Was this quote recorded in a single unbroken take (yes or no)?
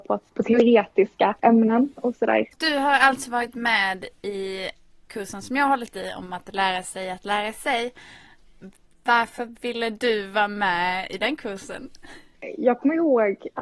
no